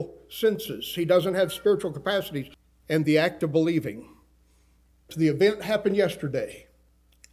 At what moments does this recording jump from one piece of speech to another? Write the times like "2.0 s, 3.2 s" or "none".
5.1 s